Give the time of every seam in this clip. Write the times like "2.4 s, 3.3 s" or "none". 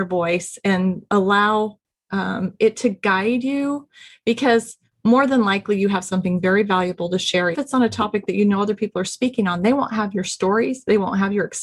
7.5 s